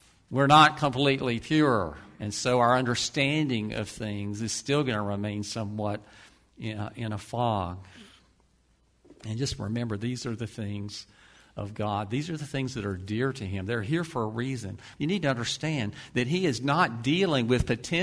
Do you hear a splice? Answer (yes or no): yes